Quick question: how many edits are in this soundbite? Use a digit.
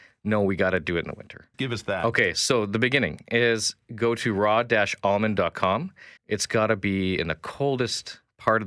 2